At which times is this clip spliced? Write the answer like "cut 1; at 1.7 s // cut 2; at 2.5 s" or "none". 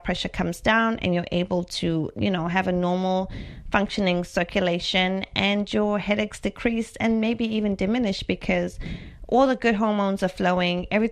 none